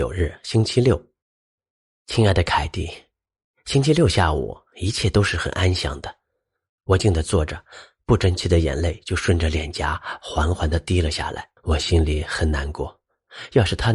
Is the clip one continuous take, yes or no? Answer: no